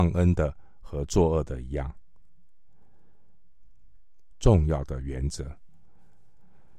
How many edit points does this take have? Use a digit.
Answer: 1